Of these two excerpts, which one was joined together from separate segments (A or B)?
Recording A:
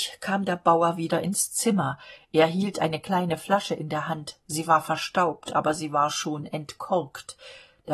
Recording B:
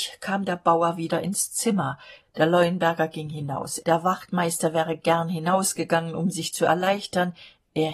B